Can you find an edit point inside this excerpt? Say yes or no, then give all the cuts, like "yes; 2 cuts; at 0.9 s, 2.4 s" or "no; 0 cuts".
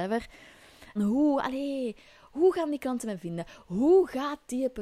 yes; 1 cut; at 1.0 s